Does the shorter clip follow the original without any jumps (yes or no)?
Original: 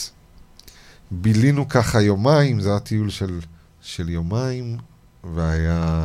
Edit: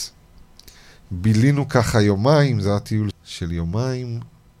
no